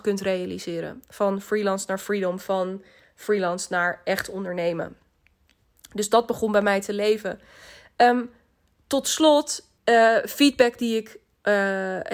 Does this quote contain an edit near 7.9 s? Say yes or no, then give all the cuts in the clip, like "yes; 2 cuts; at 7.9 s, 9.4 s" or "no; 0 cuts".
no; 1 cut; at 9.8 s